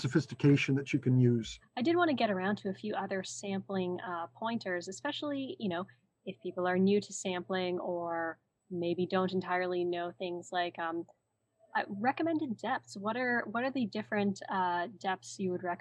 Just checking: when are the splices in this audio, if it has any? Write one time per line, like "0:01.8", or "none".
0:01.6